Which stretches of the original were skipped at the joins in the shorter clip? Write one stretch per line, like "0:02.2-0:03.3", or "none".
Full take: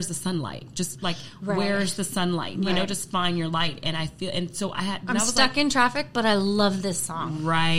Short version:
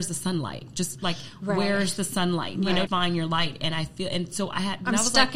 0:02.9-0:03.1